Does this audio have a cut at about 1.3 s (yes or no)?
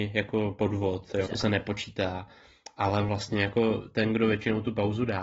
yes